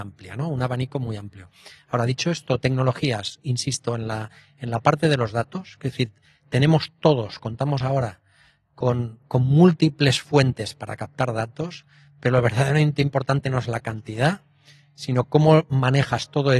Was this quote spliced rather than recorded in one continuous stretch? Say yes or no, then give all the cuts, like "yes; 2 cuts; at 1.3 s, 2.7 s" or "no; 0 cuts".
no; 0 cuts